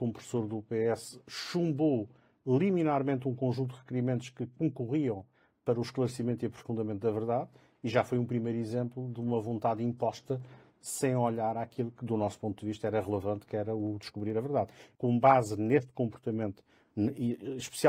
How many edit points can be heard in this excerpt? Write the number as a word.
one